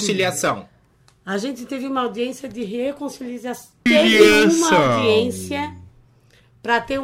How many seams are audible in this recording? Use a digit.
1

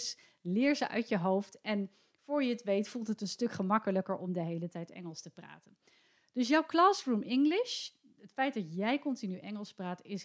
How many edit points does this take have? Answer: 0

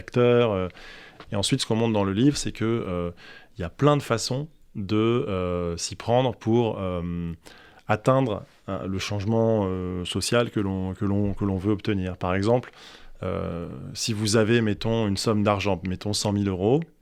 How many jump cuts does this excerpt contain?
1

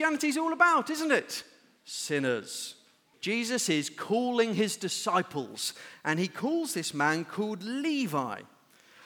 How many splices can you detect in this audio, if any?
2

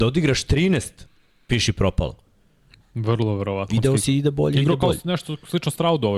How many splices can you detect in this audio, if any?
1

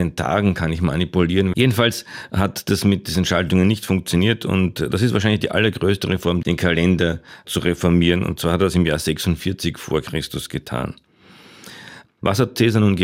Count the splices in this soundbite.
2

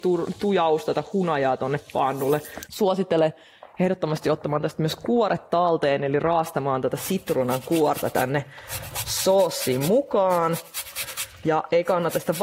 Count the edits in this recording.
1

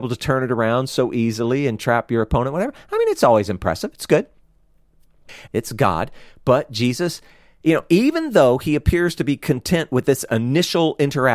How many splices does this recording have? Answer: 1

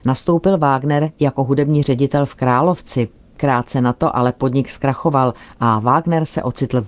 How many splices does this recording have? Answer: 0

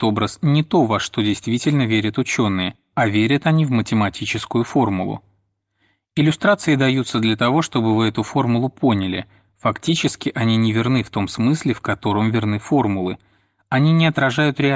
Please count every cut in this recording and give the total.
0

